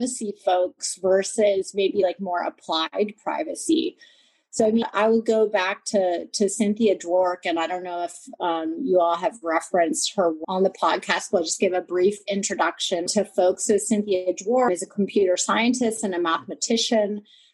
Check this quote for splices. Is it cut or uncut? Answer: uncut